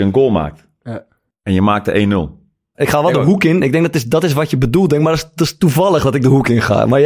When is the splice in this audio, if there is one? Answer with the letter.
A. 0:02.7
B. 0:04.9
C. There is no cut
A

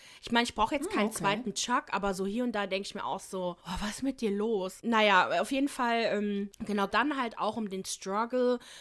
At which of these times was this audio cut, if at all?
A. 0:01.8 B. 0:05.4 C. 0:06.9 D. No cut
C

